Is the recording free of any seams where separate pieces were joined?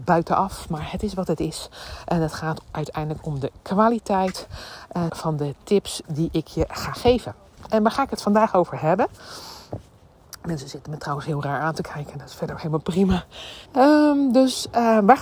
no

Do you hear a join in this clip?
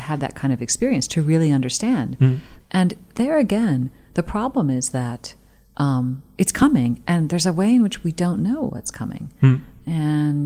yes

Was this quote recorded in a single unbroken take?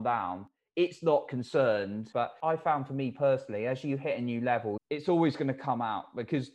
no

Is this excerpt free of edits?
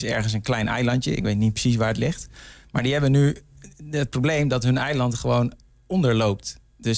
yes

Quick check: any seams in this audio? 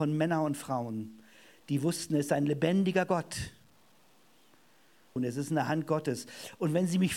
yes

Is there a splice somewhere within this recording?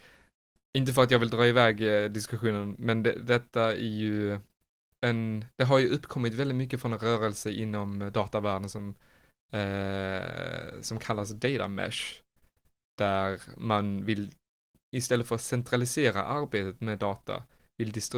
no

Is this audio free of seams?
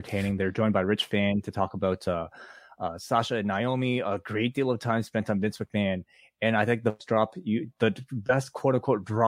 yes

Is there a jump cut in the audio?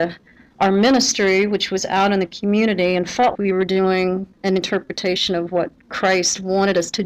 yes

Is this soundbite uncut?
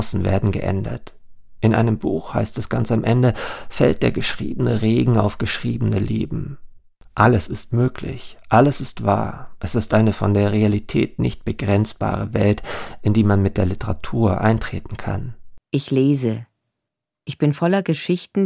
yes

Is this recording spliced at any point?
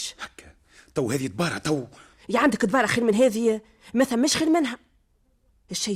no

